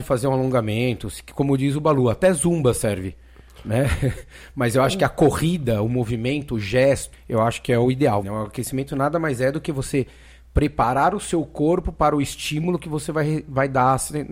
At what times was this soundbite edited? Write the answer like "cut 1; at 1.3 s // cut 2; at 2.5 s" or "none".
cut 1; at 7.1 s // cut 2; at 8.2 s

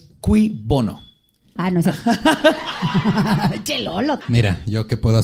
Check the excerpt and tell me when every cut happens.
cut 1; at 1.6 s // cut 2; at 4.2 s

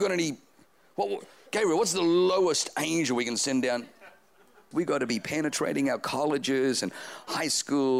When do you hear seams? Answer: cut 1; at 4.7 s

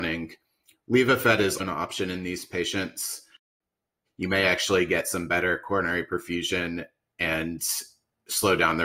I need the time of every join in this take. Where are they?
cut 1; at 1.6 s // cut 2; at 4.1 s

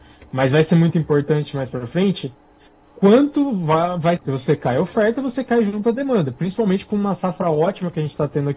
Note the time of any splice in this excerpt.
cut 1; at 4.2 s

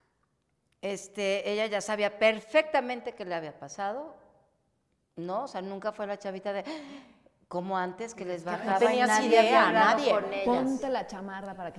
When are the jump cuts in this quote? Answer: none

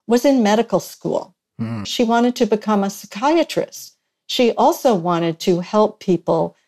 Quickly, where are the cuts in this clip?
cut 1; at 1.8 s

